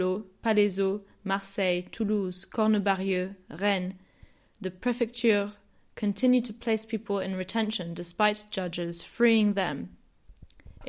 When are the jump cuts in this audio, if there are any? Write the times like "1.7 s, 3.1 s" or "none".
none